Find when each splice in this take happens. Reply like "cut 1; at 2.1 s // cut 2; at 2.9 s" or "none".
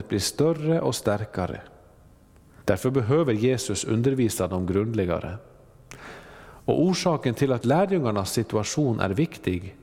cut 1; at 2.6 s // cut 2; at 7.6 s